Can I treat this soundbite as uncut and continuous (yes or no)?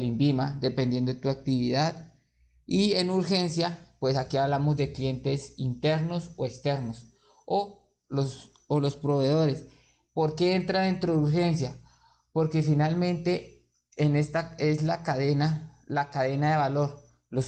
yes